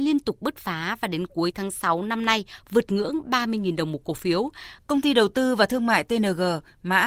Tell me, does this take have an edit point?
yes; 1 cut; at 4.8 s

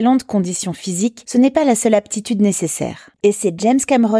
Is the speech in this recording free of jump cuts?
no; 1 cut; at 3.2 s

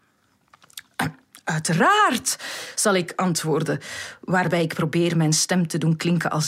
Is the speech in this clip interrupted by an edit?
no; 0 cuts

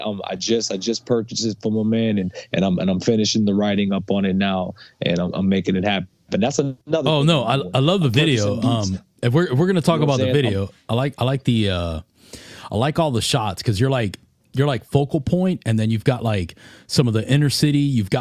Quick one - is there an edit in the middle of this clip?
yes; 1 cut; at 6.8 s

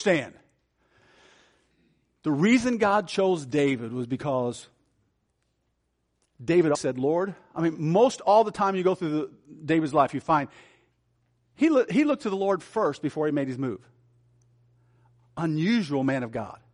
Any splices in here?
yes; 1 cut; at 6.7 s

